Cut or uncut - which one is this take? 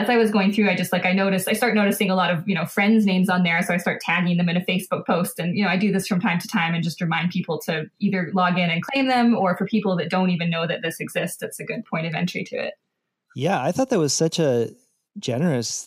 uncut